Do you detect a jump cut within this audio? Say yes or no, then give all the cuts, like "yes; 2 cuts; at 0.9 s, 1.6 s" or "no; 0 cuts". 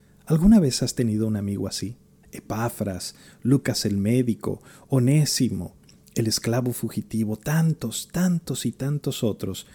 yes; 1 cut; at 2.2 s